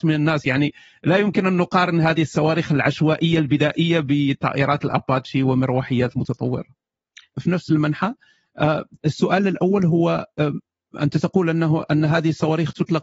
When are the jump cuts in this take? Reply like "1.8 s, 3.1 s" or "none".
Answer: 7.3 s